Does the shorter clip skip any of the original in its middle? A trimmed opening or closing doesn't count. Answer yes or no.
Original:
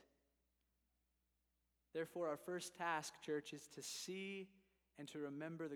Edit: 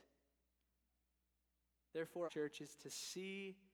yes